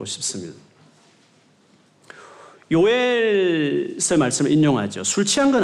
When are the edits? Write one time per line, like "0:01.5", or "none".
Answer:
none